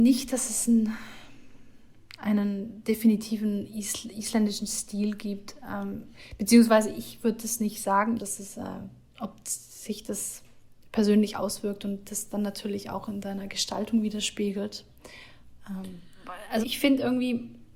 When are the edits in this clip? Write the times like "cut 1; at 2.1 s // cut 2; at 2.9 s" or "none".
cut 1; at 8.2 s // cut 2; at 16.6 s